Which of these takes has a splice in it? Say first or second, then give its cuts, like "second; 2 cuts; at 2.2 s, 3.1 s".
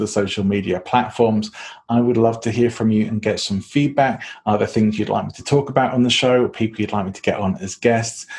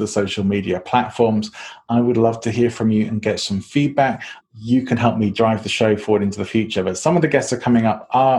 second; 1 cut; at 4.4 s